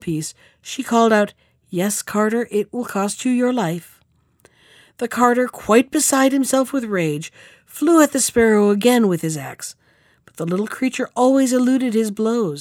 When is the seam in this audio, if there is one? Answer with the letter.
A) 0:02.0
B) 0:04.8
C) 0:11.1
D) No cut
D